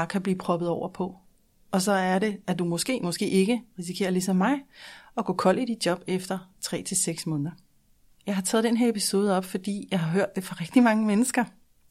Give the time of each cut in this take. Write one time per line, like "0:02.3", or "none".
none